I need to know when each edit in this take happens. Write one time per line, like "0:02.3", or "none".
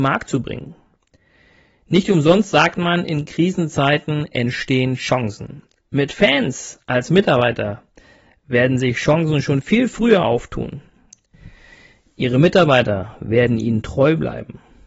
none

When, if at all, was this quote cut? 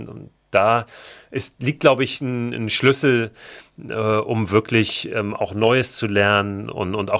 none

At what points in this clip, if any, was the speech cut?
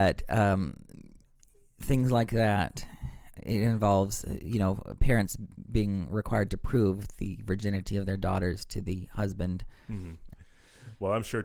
0:03.3
0:10.3

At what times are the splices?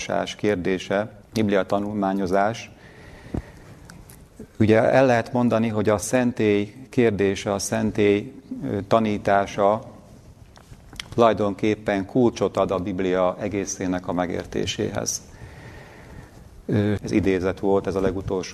0:01.2
0:17.0

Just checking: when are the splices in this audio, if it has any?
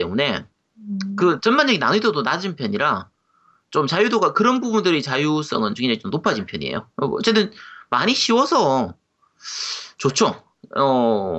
0:06.9

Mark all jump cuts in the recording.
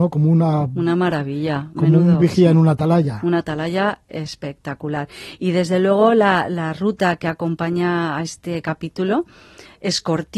none

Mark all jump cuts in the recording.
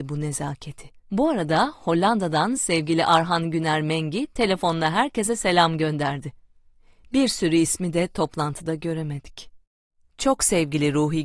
0:01.1

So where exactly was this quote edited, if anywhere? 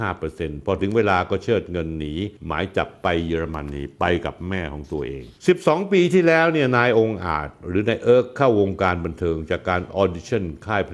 0:02.4

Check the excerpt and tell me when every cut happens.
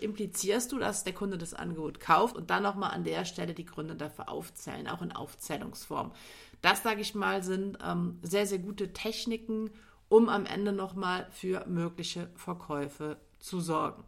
0:02.3

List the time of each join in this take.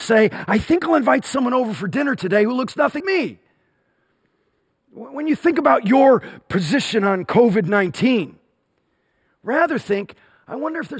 0:03.0

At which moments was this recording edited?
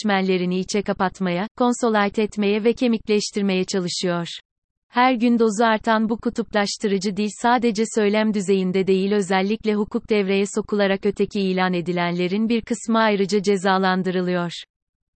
0:04.9

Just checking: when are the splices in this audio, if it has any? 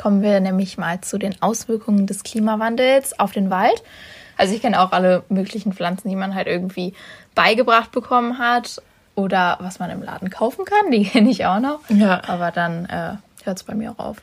0:04.3

